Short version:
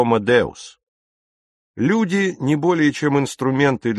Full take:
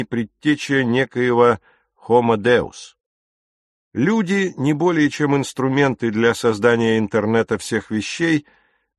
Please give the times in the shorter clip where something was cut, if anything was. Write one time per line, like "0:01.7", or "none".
none